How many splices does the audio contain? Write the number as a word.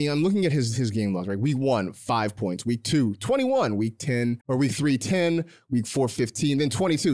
one